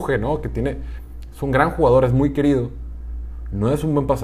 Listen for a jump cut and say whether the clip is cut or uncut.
uncut